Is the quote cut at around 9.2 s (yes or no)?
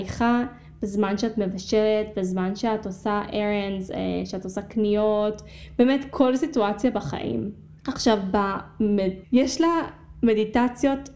yes